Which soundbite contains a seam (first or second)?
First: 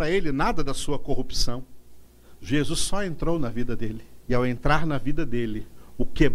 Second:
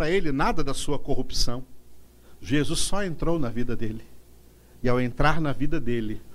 first